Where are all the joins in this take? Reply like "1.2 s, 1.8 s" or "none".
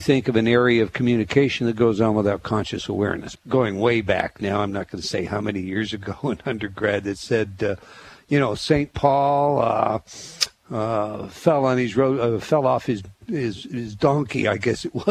3.4 s